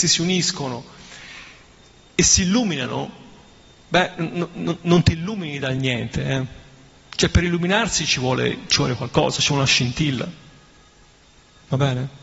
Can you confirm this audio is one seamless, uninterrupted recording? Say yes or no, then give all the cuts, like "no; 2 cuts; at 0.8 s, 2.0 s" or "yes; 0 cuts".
no; 1 cut; at 4.1 s